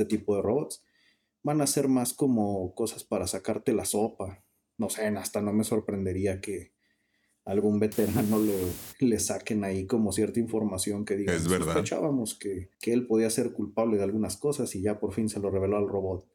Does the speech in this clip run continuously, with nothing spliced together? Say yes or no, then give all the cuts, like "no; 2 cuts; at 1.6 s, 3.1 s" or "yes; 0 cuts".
no; 1 cut; at 12.7 s